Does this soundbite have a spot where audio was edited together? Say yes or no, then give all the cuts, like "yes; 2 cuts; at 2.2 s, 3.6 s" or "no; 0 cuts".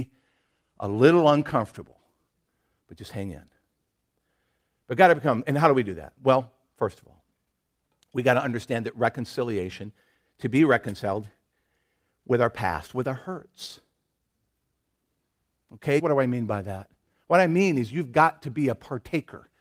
yes; 1 cut; at 16.0 s